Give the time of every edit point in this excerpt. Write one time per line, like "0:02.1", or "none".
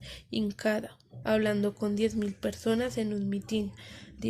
0:01.2